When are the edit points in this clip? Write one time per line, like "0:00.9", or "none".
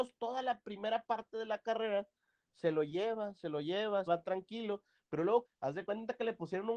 0:04.1
0:05.4